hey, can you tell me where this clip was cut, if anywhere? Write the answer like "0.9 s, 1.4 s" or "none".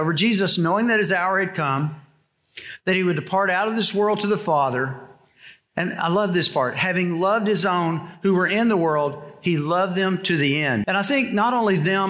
10.8 s